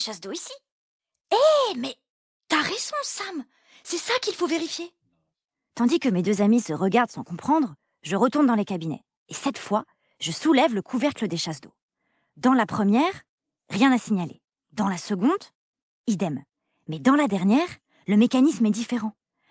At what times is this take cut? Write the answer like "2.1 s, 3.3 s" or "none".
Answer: none